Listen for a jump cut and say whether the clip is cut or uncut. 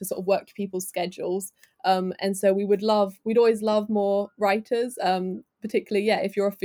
uncut